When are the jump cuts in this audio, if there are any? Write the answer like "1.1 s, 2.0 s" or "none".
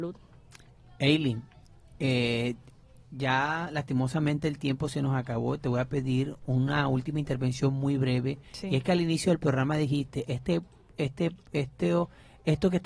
none